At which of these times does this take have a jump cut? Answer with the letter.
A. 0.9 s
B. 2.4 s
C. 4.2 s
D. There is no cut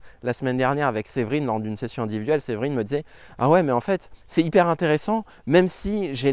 C